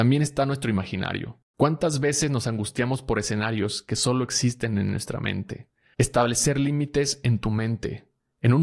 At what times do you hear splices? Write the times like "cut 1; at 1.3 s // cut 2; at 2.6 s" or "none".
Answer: cut 1; at 5.9 s

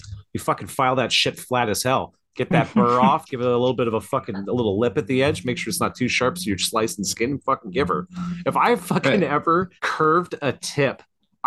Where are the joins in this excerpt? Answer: cut 1; at 9.8 s

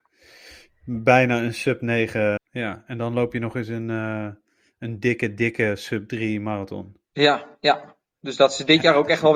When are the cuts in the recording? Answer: cut 1; at 2.4 s

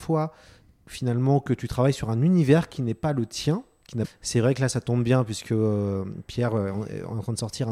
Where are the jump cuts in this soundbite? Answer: cut 1; at 4.0 s

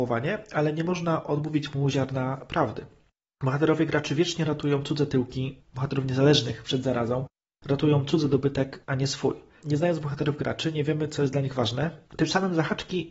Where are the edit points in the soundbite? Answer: cut 1; at 9.6 s // cut 2; at 12.0 s

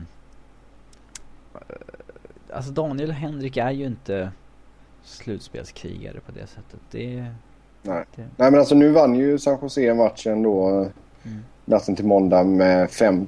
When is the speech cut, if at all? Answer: cut 1; at 8.1 s

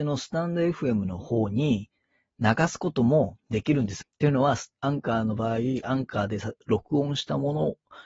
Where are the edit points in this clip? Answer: cut 1; at 4.0 s // cut 2; at 5.8 s

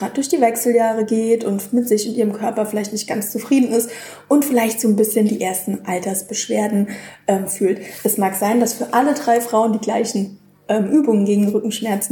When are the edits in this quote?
none

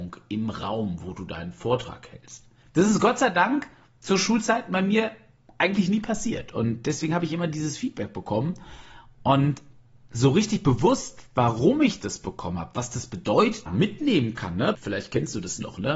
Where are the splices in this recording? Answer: cut 1; at 13.7 s // cut 2; at 14.7 s

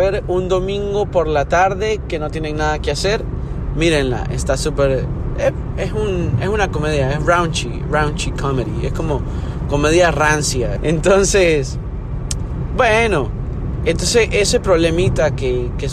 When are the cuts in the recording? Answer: cut 1; at 10.8 s // cut 2; at 13.8 s

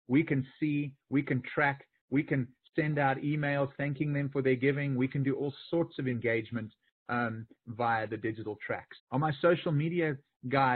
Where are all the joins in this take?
cut 1; at 9.0 s

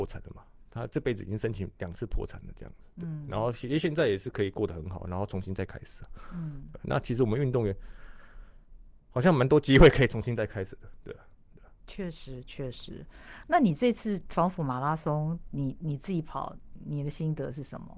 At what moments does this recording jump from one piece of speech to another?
cut 1; at 12.4 s

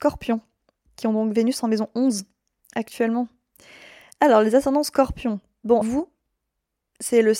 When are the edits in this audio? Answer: cut 1; at 5.8 s

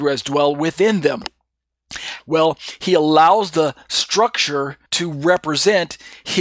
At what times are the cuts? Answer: cut 1; at 2.2 s // cut 2; at 4.9 s

